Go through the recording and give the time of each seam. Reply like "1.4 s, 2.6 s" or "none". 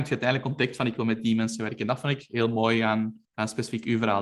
3.2 s